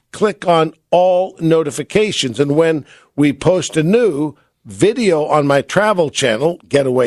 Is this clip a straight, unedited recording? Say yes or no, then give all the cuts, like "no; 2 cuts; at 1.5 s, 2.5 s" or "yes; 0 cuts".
yes; 0 cuts